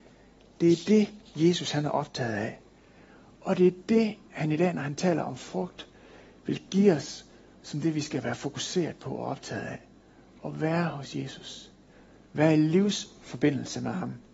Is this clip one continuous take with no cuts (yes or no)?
yes